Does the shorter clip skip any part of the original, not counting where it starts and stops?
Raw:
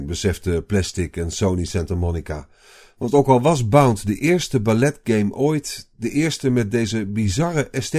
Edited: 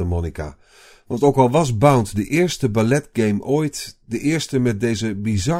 no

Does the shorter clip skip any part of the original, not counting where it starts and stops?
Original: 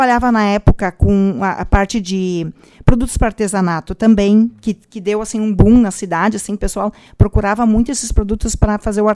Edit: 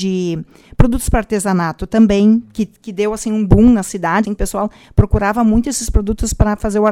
yes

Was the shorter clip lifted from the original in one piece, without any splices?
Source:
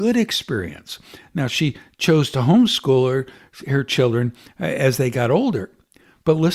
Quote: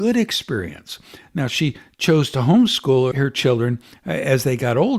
no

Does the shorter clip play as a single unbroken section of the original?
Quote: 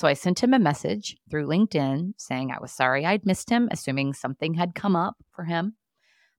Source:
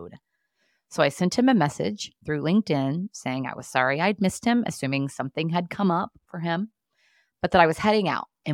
yes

